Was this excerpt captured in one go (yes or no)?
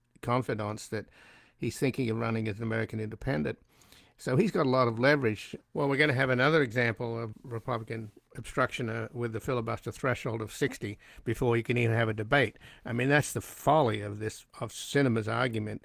no